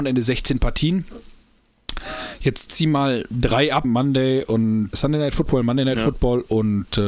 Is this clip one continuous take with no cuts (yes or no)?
no